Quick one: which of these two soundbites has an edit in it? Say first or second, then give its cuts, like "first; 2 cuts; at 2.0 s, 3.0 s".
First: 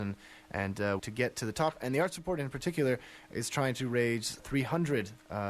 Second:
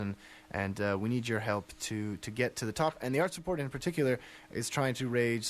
first; 2 cuts; at 1.0 s, 4.4 s